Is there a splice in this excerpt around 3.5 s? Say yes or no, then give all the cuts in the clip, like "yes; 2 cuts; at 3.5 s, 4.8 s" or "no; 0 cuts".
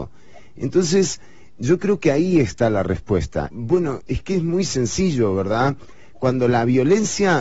yes; 1 cut; at 3.5 s